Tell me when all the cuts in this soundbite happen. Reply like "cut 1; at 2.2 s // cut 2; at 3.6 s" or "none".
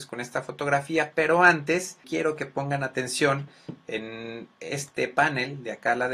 cut 1; at 2.0 s